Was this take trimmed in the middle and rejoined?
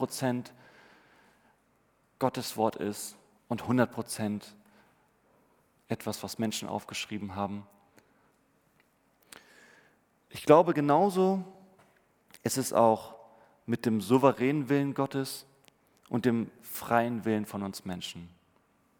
no; 0 cuts

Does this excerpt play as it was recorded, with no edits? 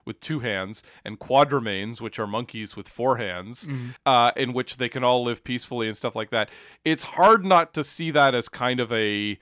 yes; 0 cuts

